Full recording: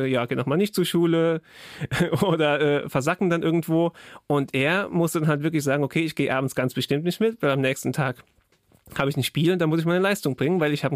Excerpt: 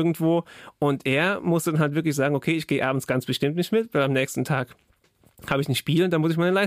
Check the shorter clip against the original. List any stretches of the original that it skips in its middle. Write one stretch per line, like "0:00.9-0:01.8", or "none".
none

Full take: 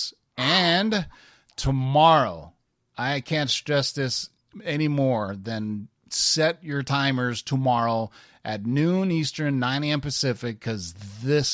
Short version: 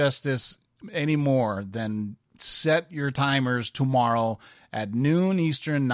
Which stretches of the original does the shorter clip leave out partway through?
none

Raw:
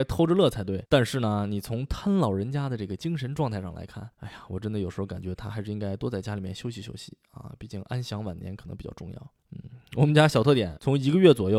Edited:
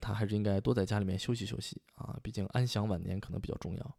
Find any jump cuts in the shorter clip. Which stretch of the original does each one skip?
none

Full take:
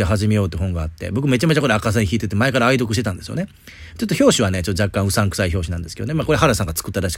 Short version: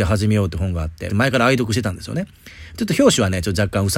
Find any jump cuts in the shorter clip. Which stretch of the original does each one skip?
0:01.1-0:02.3

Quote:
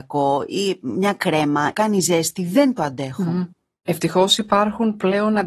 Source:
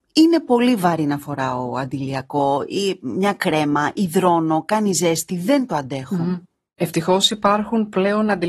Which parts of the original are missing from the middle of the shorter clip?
0:03.9-0:04.7

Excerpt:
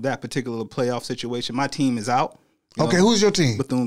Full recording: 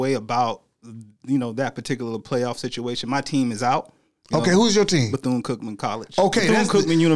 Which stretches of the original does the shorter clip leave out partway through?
none

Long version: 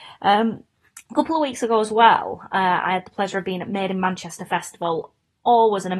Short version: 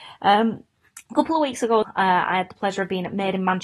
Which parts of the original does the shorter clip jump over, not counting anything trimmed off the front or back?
0:01.8-0:02.4

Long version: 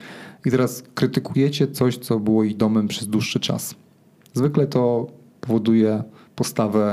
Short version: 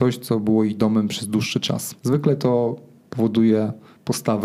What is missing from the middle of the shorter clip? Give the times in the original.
0:03.8-0:04.3

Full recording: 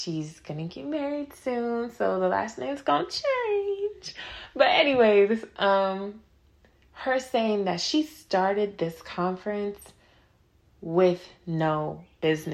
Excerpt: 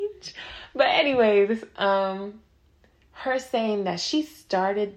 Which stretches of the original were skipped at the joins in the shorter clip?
none

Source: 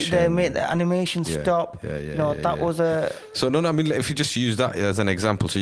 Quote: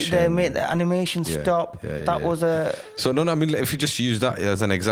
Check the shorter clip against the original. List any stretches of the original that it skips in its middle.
0:02.0-0:02.4

